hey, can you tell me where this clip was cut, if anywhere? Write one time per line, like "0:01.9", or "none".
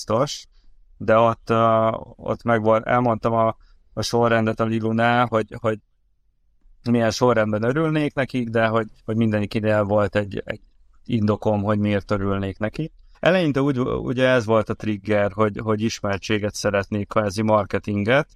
0:09.0
0:13.1